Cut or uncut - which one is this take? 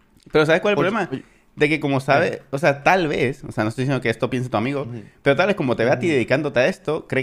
uncut